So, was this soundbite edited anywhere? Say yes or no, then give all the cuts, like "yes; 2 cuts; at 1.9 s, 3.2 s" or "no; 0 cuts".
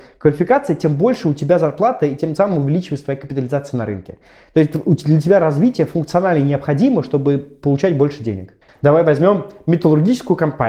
yes; 1 cut; at 8.7 s